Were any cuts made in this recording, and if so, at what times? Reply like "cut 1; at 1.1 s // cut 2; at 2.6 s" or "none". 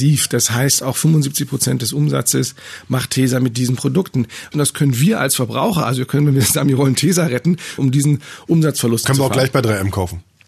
cut 1; at 4.5 s // cut 2; at 7.8 s // cut 3; at 9.0 s

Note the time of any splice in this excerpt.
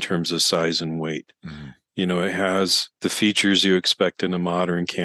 cut 1; at 1.8 s // cut 2; at 3.0 s

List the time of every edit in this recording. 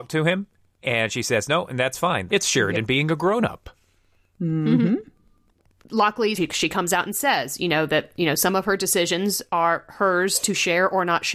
cut 1; at 2.3 s // cut 2; at 6.3 s

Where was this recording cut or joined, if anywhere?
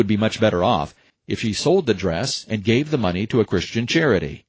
cut 1; at 1.1 s

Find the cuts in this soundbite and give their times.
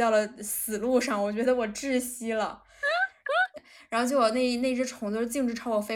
cut 1; at 3.6 s

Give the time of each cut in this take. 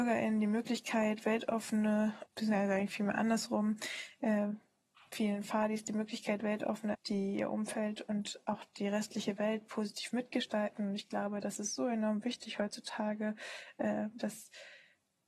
cut 1; at 2.3 s // cut 2; at 6.9 s

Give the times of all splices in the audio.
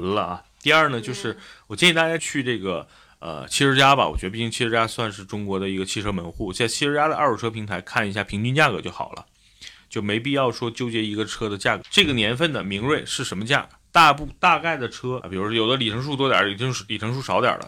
cut 1; at 2.2 s // cut 2; at 11.8 s // cut 3; at 15.2 s

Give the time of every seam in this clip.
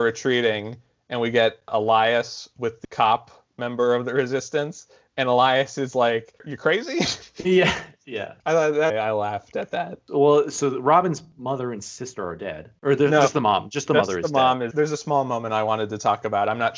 cut 1; at 6.4 s // cut 2; at 8.9 s // cut 3; at 14.7 s

